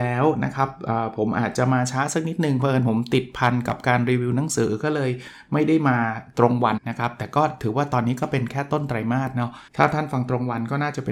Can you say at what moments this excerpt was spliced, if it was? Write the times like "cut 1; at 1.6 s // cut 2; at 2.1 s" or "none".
cut 1; at 6.8 s // cut 2; at 9.7 s